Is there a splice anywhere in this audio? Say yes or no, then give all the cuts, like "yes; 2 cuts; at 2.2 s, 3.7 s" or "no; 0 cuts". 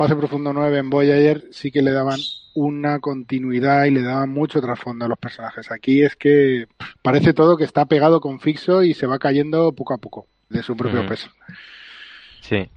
yes; 2 cuts; at 7.0 s, 10.5 s